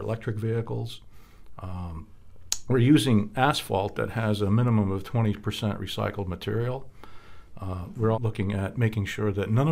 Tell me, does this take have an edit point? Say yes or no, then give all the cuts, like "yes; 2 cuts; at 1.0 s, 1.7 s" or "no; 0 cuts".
yes; 1 cut; at 8.1 s